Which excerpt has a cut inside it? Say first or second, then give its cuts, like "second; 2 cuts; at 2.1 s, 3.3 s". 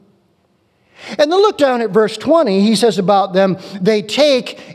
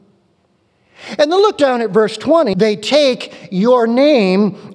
second; 1 cut; at 2.5 s